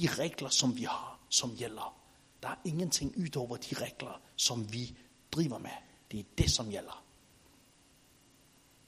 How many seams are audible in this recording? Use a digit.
0